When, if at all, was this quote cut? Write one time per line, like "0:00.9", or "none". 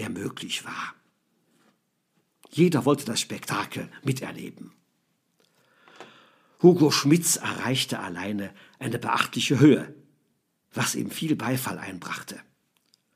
none